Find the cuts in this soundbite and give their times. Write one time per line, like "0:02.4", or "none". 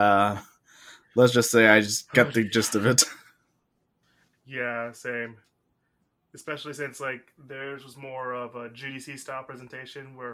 none